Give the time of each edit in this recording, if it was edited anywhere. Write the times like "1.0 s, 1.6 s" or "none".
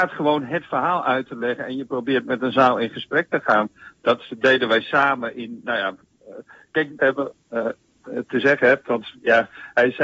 7.0 s